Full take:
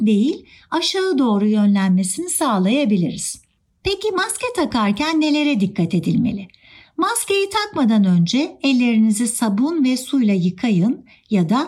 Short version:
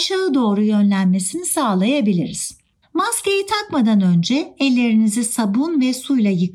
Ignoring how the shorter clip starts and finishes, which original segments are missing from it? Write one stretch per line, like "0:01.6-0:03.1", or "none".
0:03.7-0:06.9

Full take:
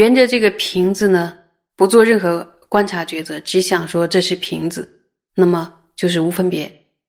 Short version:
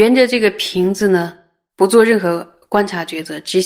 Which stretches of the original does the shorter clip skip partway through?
none

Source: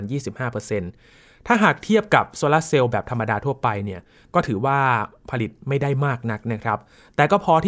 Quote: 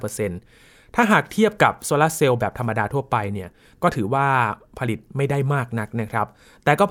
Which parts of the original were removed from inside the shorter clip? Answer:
none

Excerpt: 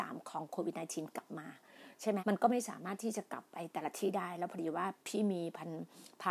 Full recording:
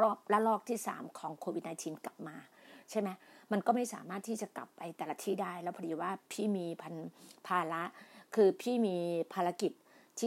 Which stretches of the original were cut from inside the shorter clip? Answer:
0:03.1-0:03.4

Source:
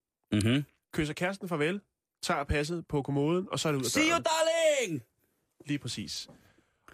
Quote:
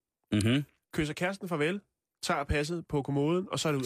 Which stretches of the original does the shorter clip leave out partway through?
none

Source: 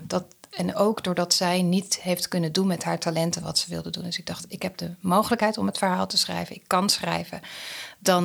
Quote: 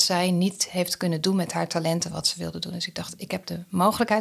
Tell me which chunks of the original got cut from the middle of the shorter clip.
none

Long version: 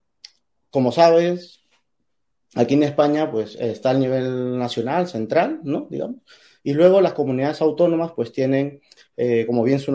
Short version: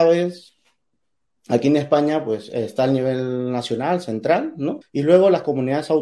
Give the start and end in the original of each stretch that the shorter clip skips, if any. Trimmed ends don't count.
0:05.9-0:06.5

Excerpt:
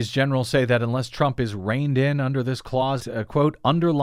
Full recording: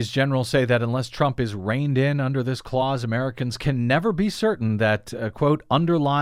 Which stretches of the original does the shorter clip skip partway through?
0:03.0-0:05.1

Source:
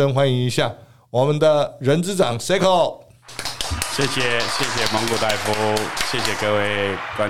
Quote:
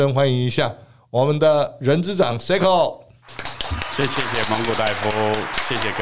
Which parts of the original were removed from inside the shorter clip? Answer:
0:04.1-0:04.6

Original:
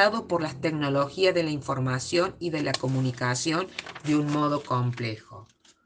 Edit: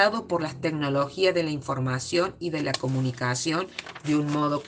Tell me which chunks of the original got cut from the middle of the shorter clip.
none

